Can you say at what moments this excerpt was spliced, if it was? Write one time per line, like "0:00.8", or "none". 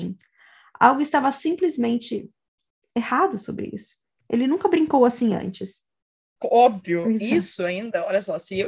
0:06.4